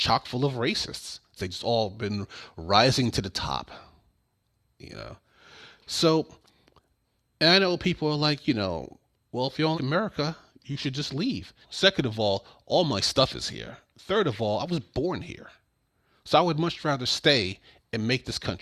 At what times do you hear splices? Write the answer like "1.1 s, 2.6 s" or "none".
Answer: 1.4 s, 9.7 s, 11.6 s